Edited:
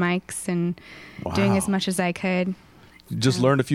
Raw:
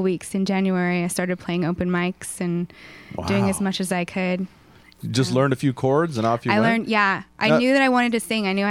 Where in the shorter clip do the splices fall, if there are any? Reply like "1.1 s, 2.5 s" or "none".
none

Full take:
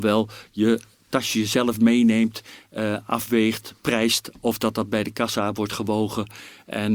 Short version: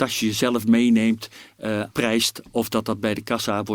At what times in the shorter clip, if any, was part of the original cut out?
1.9 s

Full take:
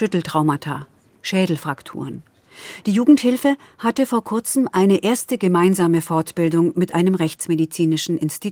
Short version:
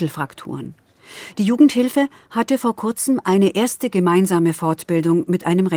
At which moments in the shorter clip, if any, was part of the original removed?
none

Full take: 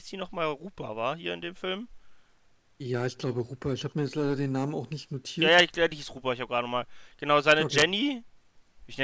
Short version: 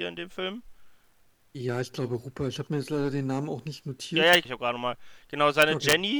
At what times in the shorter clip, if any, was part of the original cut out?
4.5 s

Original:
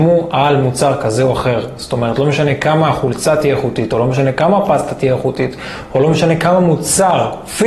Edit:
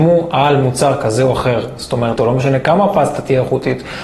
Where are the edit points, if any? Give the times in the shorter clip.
2.2 s

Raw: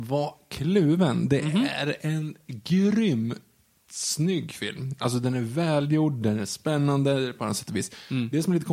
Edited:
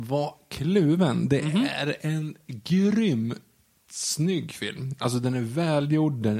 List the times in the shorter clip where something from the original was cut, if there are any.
none

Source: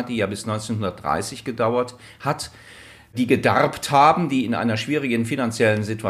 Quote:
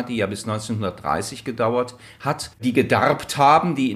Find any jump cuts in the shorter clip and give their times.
2.5 s

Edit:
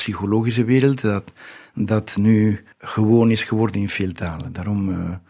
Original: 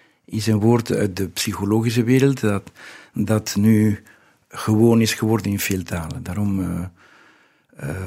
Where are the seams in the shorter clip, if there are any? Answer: 2.7 s

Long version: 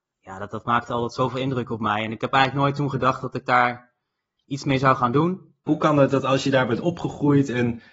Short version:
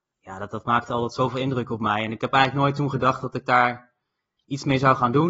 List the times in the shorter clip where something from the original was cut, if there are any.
none

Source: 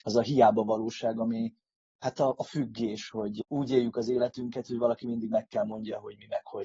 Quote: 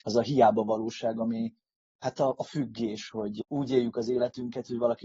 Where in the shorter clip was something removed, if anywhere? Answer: none

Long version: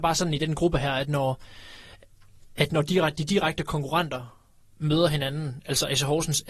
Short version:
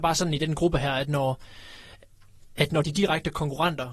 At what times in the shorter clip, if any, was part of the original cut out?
2.8 s

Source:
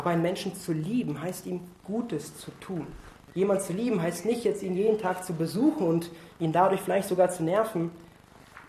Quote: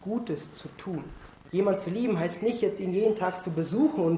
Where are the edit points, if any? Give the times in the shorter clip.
none

